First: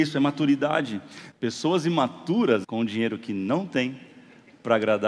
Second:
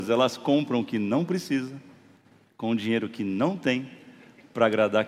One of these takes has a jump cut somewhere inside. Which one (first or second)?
first